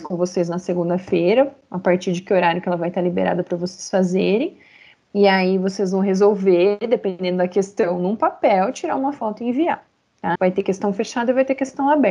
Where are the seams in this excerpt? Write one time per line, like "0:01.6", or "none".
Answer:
0:10.4